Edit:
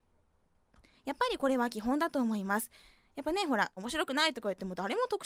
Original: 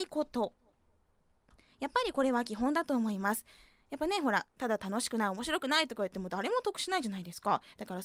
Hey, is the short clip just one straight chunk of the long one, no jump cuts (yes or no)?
no